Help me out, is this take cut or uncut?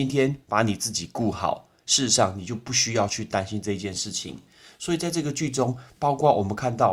uncut